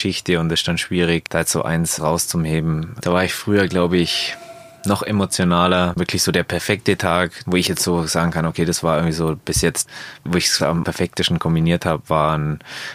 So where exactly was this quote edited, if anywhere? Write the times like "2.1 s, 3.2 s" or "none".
3.0 s, 5.9 s